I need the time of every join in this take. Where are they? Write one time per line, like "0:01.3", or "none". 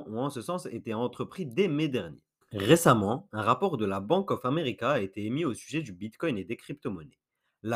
0:02.4